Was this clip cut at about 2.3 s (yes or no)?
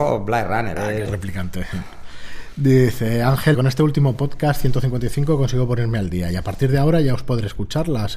no